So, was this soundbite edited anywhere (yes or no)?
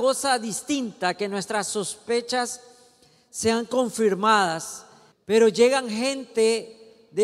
yes